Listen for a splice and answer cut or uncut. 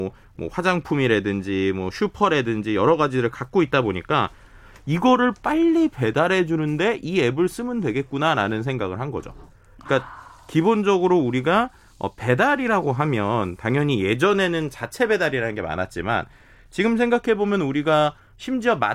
uncut